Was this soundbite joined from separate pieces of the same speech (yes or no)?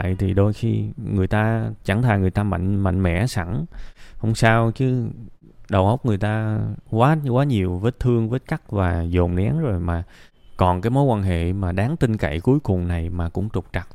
no